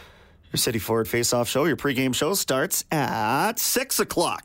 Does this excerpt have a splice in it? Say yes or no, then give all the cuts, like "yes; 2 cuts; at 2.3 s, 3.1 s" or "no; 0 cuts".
no; 0 cuts